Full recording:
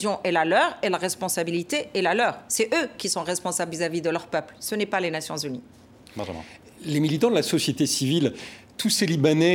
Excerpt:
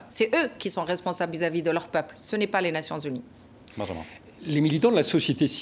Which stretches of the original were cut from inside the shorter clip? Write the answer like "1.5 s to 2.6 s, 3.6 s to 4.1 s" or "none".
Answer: none

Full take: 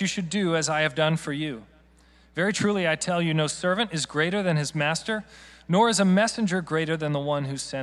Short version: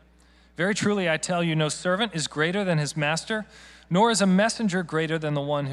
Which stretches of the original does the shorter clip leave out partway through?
none

